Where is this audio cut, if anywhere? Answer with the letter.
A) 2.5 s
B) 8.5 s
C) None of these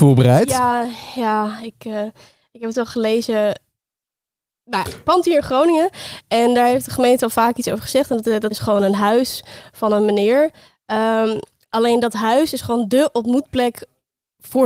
B